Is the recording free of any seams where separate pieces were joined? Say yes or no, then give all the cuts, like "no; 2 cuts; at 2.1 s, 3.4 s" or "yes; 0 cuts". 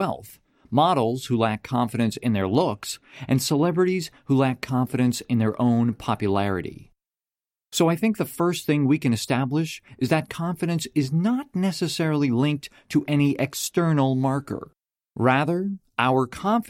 yes; 0 cuts